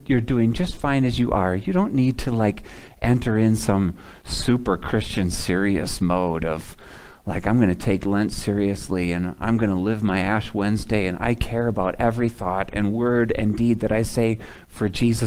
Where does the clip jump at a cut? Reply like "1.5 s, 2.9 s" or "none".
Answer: none